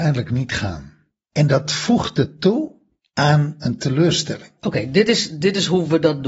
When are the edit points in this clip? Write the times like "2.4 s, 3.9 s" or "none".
4.6 s